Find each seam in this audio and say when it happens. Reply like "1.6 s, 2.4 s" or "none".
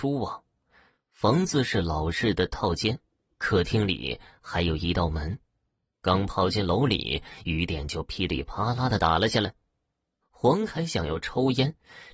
5.9 s